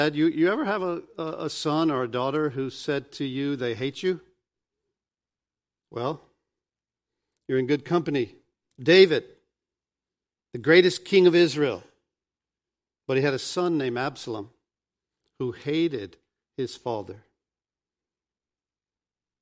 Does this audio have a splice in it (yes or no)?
yes